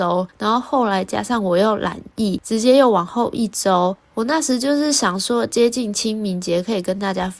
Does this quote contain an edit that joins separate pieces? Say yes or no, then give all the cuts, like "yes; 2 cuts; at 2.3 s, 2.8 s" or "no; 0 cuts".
no; 0 cuts